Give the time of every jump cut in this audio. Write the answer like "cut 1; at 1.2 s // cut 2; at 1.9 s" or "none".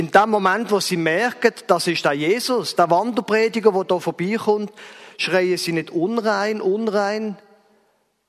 none

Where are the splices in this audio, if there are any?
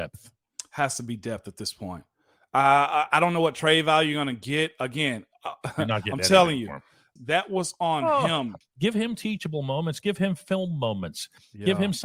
cut 1; at 7.2 s // cut 2; at 8.6 s

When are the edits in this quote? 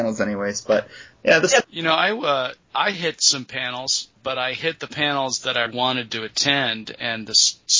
cut 1; at 1.6 s // cut 2; at 5.7 s

